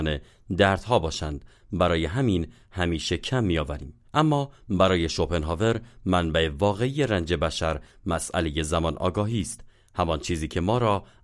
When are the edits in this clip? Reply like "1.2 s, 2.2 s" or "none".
4.1 s